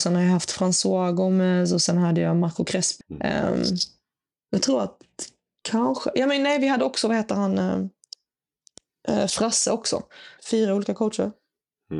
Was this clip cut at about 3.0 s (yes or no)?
yes